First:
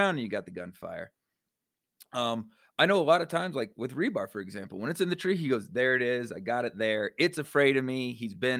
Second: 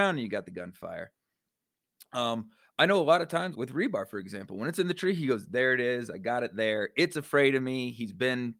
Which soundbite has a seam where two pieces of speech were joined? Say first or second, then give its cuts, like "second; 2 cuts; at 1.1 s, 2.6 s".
second; 1 cut; at 3.5 s